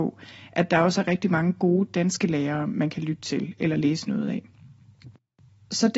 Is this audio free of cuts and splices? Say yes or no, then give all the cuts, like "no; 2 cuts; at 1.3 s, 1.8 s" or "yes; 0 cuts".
yes; 0 cuts